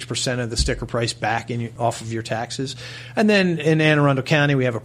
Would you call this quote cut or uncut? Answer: uncut